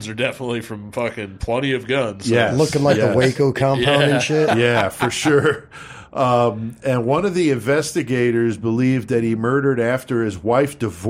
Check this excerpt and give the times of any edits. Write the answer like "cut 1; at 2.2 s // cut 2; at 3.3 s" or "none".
none